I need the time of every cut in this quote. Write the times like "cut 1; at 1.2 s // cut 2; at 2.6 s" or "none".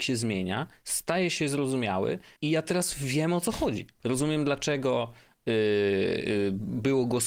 cut 1; at 2.4 s // cut 2; at 4.0 s